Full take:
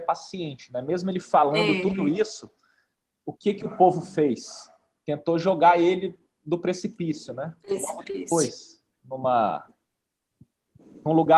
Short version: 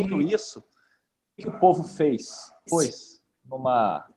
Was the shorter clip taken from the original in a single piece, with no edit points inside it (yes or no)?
no